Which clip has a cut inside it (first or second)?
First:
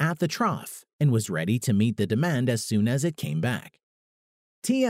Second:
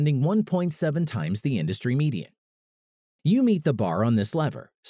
second